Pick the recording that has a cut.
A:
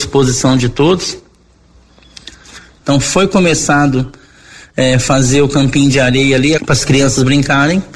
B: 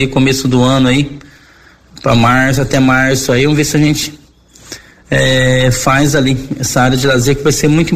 A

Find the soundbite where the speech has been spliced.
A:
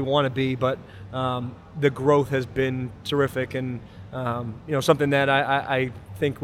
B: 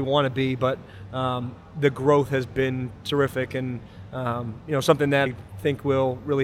B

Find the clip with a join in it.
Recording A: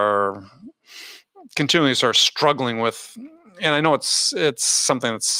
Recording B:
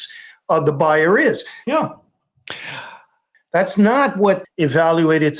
B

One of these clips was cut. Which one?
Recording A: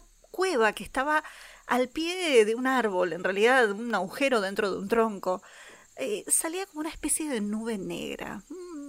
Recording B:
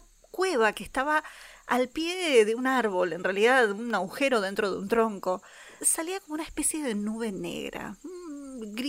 B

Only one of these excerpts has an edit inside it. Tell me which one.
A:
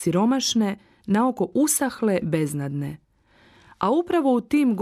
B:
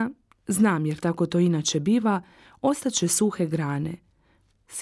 A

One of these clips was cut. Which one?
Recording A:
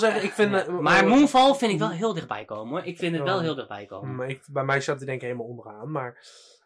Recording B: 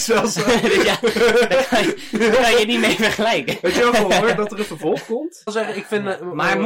B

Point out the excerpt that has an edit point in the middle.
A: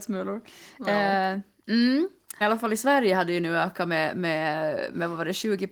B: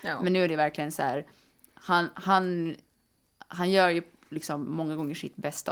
A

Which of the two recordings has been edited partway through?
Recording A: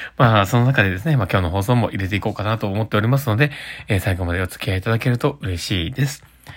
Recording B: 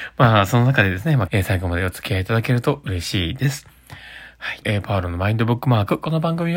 B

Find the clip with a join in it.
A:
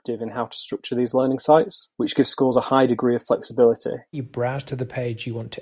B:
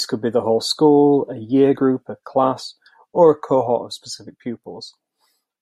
A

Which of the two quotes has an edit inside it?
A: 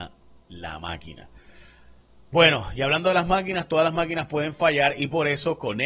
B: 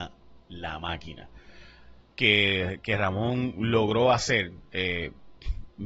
B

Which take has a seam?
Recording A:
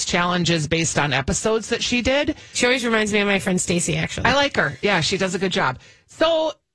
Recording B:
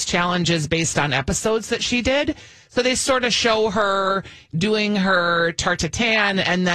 A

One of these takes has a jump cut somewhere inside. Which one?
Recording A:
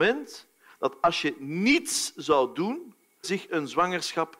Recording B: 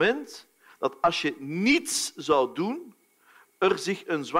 A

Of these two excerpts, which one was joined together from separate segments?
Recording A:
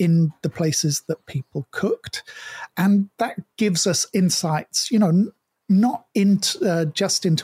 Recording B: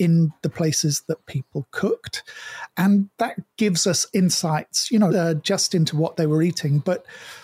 B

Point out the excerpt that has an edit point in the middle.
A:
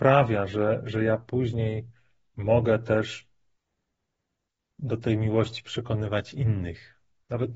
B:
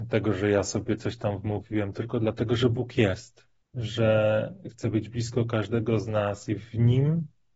B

